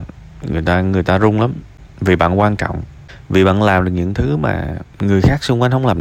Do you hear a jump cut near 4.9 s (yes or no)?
yes